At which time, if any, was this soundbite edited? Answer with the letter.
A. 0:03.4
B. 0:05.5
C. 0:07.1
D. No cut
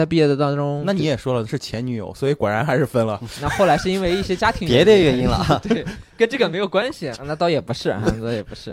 C